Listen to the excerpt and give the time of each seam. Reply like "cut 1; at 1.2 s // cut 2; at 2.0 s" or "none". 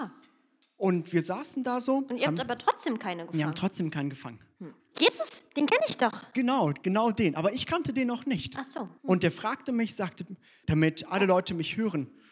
cut 1; at 4.8 s // cut 2; at 9.0 s // cut 3; at 10.6 s